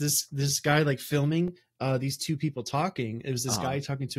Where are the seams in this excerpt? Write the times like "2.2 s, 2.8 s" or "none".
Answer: none